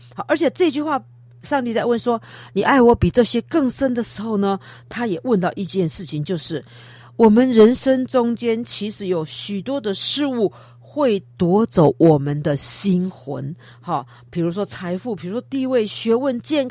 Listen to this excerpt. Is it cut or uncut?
uncut